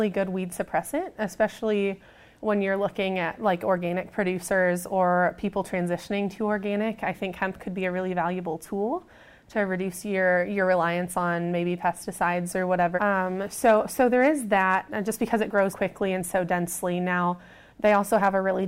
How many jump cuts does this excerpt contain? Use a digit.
2